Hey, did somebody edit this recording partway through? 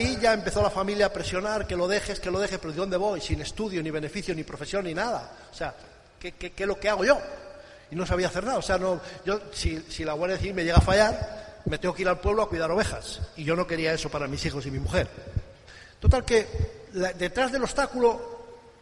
no; 0 cuts

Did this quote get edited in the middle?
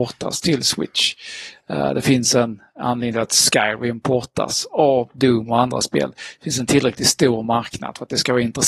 no; 0 cuts

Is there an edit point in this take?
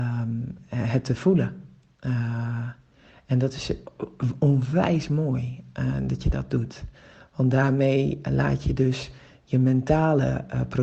no; 0 cuts

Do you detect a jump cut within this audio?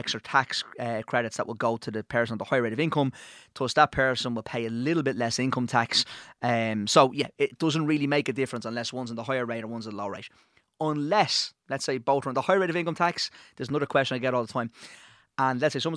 no; 0 cuts

